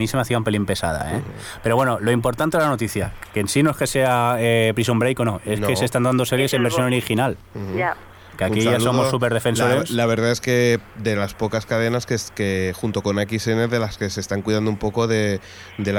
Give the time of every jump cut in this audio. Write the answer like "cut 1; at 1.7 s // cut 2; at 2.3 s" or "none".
none